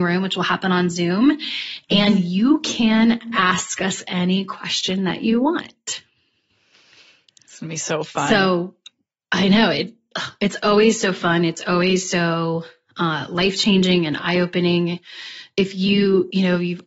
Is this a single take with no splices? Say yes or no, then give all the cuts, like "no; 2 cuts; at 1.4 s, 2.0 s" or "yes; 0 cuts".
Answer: yes; 0 cuts